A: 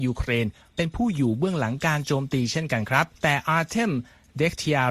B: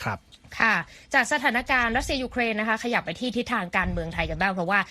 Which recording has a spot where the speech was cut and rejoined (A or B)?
A